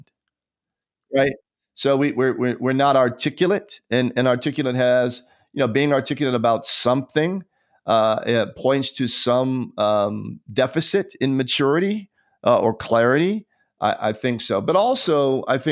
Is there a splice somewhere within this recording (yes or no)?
no